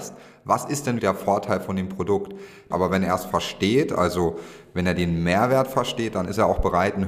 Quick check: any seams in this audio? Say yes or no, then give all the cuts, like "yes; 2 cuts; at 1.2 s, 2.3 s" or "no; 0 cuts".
yes; 2 cuts; at 1.0 s, 2.7 s